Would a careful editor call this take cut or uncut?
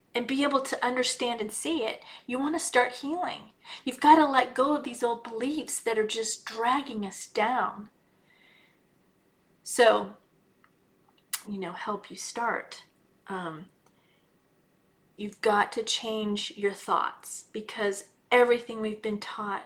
cut